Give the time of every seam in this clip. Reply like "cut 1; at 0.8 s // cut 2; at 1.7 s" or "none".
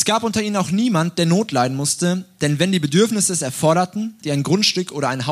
cut 1; at 4.2 s